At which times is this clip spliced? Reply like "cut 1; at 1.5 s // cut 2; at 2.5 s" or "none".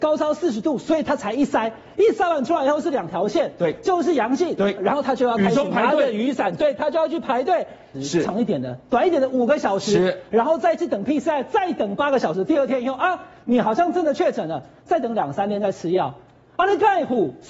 cut 1; at 4.8 s // cut 2; at 8.0 s